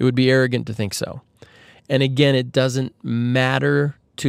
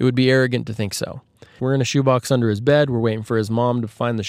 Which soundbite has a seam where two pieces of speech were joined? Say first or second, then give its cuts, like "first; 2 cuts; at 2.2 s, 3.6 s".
second; 1 cut; at 1.6 s